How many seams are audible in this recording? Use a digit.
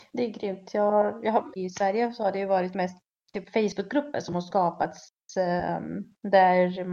2